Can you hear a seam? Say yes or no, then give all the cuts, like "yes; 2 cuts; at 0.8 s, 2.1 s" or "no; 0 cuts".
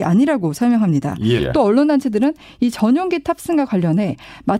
yes; 1 cut; at 1.4 s